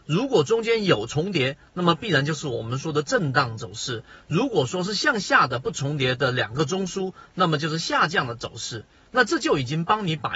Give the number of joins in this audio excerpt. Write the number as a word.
zero